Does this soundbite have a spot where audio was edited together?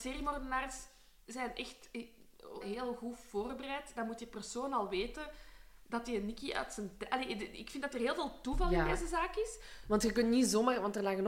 yes; 1 cut; at 2.6 s

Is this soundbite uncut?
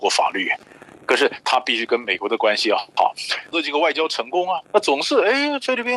no; 3 cuts; at 0.9 s, 3.5 s, 4.6 s

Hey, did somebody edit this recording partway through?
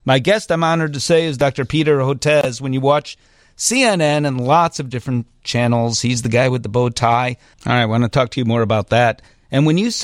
yes; 1 cut; at 7.5 s

